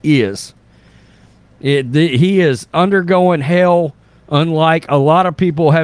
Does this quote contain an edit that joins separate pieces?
no; 0 cuts

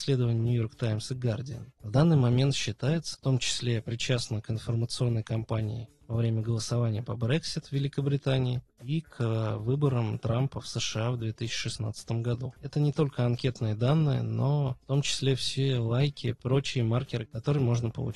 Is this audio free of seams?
no; 2 cuts; at 3.1 s, 12.6 s

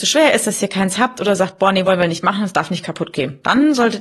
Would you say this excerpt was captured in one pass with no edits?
yes; 0 cuts

